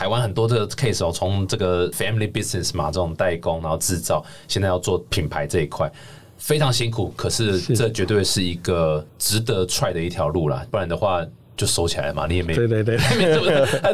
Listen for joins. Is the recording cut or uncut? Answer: uncut